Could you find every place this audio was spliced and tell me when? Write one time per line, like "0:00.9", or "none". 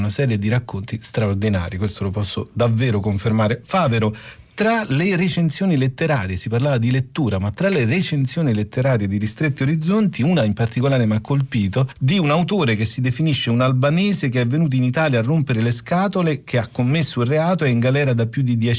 none